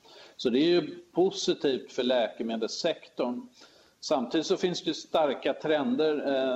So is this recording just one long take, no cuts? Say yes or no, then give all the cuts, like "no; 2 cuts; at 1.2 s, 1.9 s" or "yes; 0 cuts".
yes; 0 cuts